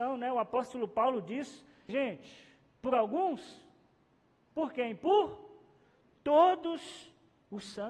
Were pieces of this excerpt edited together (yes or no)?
yes